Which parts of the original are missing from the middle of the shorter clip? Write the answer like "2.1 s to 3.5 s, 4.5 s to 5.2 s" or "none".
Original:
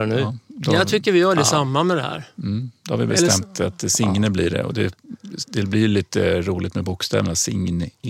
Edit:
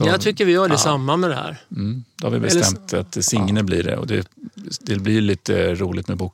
none